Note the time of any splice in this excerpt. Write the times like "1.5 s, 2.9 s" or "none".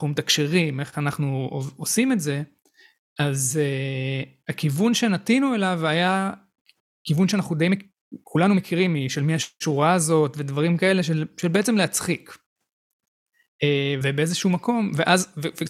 14.0 s